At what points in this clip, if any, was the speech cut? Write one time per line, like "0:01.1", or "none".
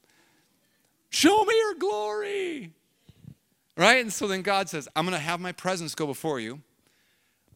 0:04.9

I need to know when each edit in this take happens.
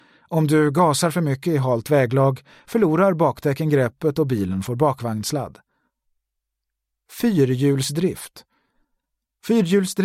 none

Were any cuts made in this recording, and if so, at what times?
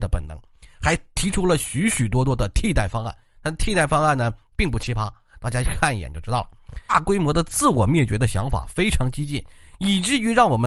0:06.9

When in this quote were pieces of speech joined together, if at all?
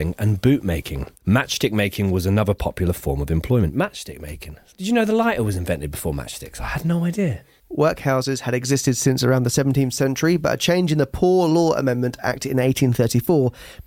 0:07.6

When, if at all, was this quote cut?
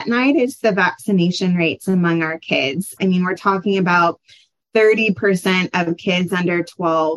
0:03.0

